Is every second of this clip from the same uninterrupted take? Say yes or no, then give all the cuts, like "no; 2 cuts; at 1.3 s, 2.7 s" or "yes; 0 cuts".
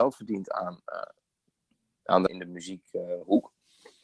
no; 1 cut; at 2.3 s